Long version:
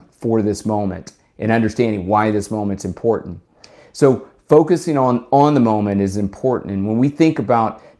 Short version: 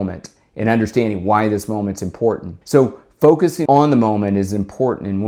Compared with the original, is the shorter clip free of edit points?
no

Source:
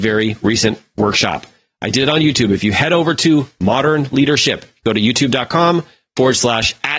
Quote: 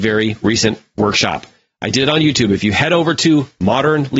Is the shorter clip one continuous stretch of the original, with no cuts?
yes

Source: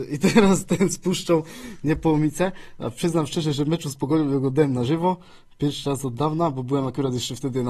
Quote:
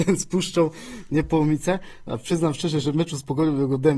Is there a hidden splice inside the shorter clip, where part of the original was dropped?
no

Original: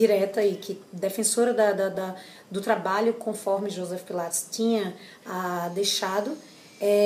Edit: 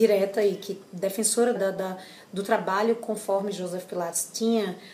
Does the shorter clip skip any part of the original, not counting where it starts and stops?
yes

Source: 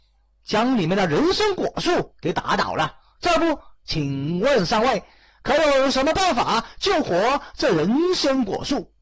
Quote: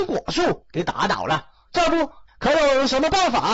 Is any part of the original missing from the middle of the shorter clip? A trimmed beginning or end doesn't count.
yes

